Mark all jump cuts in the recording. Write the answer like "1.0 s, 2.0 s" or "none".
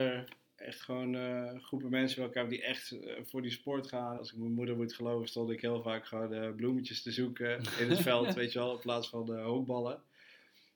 4.2 s